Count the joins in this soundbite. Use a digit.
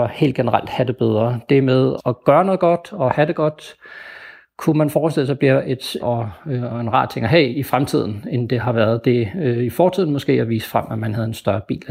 2